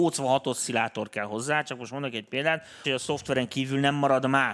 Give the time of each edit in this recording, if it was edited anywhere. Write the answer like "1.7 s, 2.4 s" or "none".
2.8 s